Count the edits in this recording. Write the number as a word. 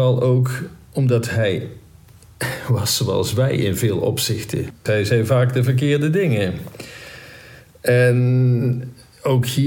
one